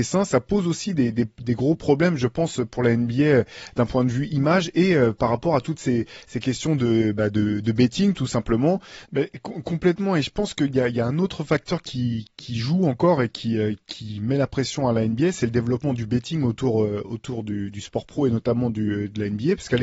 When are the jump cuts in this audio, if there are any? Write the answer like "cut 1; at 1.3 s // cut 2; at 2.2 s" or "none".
cut 1; at 9.0 s